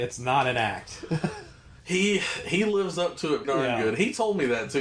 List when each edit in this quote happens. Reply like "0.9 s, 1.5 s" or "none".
3.4 s